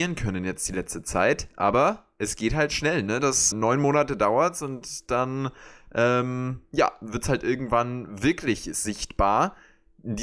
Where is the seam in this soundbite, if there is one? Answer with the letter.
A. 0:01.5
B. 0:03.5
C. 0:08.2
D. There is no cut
B